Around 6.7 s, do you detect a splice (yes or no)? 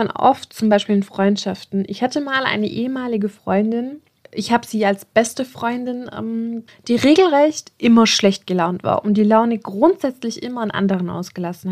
yes